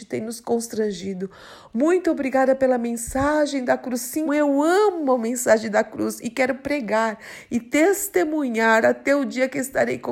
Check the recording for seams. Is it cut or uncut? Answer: cut